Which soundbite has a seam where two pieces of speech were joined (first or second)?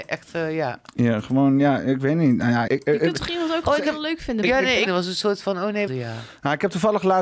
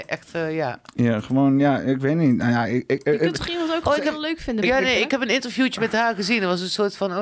first